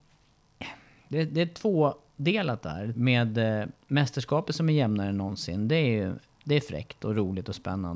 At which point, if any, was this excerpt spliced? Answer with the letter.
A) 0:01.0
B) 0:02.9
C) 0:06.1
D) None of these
B